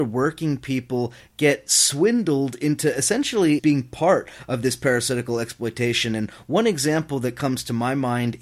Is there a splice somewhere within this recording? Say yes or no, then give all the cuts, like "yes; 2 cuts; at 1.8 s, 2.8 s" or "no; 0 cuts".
yes; 1 cut; at 3.6 s